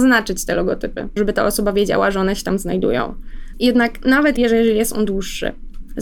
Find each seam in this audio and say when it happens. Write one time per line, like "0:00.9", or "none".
0:01.2
0:03.5

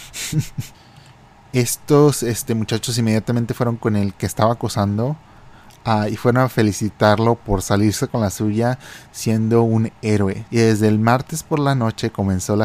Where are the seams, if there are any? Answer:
0:10.5

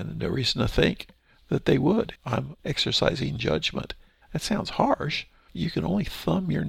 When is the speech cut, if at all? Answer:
0:02.1
0:04.2
0:05.5

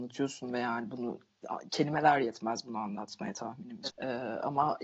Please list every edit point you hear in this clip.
0:03.9

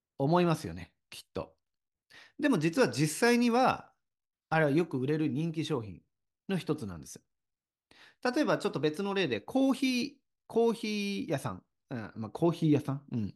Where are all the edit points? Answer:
none

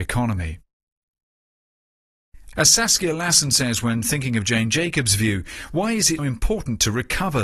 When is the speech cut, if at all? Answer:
0:02.5
0:06.2

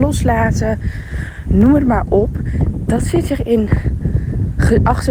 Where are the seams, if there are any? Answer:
none

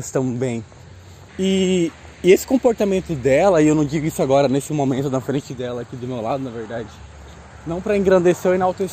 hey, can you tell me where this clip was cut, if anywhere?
0:01.3

